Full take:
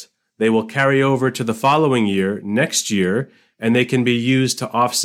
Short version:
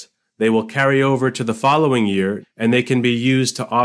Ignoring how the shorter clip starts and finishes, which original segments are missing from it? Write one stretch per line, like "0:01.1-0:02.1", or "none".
0:02.4-0:03.4